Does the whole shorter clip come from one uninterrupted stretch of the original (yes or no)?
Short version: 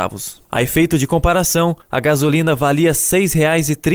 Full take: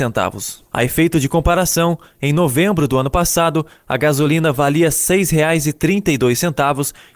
no